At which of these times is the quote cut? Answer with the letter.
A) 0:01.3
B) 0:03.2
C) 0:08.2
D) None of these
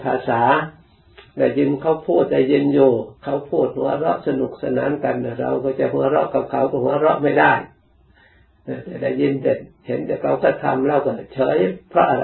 B